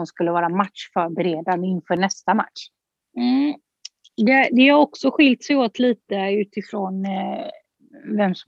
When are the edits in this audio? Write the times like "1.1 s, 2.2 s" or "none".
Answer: 3.0 s